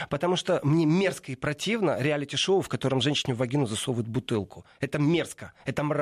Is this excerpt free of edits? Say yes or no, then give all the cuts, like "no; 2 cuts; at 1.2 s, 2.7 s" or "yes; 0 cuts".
yes; 0 cuts